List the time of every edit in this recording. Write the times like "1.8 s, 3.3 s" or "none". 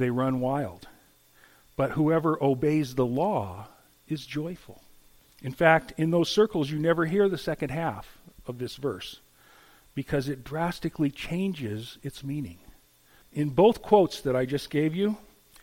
5.2 s, 13.2 s